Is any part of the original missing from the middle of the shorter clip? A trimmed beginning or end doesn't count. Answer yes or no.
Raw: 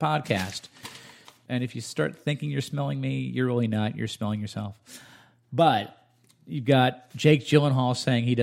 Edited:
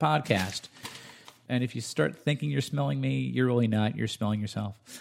no